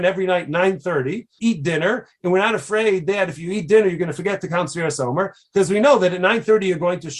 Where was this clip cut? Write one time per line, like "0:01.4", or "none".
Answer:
0:01.4